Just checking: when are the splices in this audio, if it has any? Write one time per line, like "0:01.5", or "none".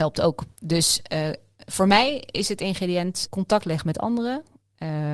0:03.3

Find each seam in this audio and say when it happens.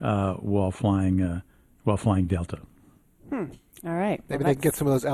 none

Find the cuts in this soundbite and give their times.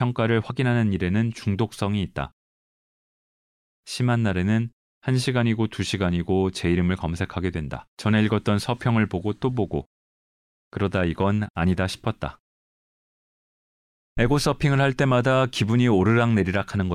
0:07.9

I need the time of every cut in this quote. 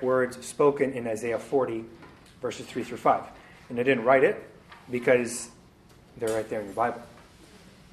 none

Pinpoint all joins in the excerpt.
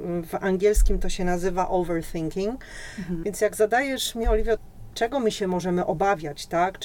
0:03.2
0:04.6

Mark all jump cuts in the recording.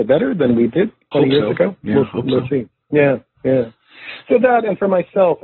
0:01.1

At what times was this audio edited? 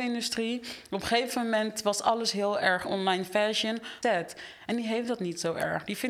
0:02.8
0:04.0

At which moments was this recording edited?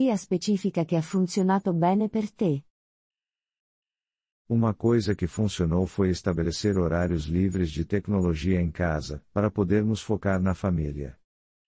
none

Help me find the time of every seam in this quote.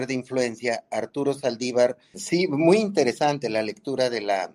0:02.1

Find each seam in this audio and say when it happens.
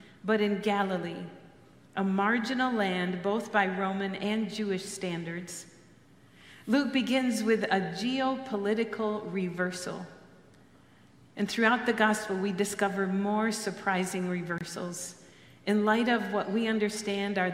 none

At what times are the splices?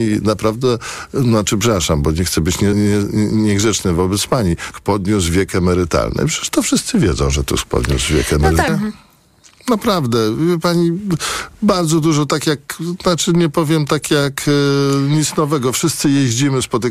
0:02.7
0:04.7
0:08.7

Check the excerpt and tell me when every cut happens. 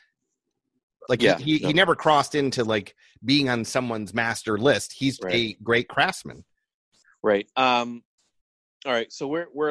0:01.0
0:05.2

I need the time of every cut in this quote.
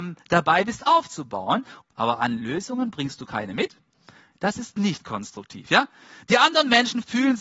0:01.8

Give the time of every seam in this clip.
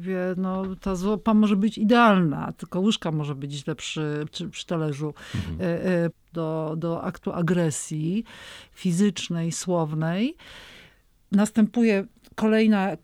0:06.1

